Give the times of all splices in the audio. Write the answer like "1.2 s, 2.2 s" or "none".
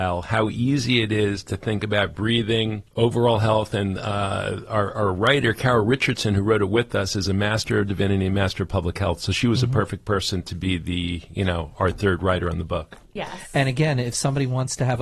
2.9 s, 13.2 s